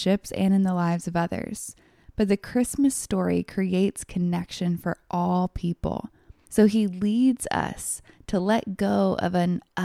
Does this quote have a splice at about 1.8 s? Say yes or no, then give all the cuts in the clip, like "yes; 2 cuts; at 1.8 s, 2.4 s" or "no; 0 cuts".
no; 1 cut; at 6.5 s